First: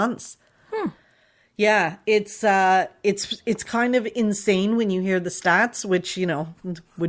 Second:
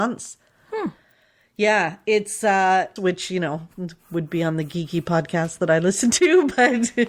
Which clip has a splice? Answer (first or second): second